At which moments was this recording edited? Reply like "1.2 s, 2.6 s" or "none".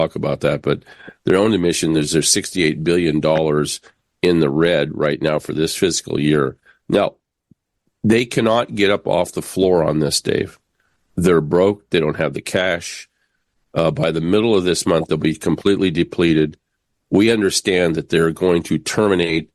none